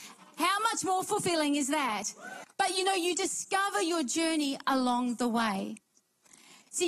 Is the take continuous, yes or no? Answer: no